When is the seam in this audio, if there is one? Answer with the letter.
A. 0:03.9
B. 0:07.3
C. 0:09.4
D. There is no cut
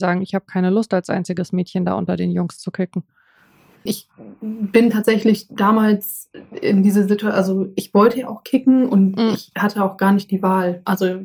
A